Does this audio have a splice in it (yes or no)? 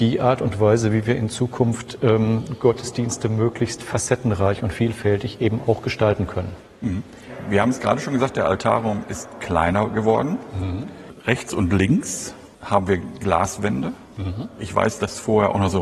yes